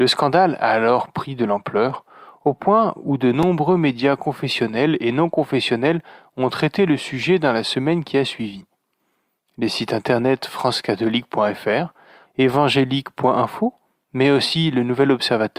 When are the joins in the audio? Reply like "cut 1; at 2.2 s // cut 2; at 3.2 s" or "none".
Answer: cut 1; at 12.3 s